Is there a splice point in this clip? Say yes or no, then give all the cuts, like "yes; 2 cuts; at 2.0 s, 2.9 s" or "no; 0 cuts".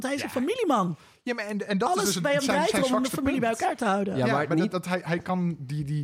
no; 0 cuts